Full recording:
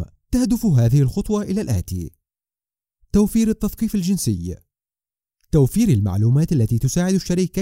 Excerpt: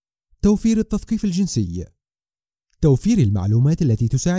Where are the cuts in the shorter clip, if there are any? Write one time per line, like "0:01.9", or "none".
none